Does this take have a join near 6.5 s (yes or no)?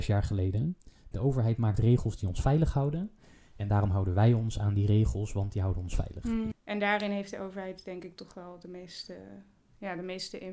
yes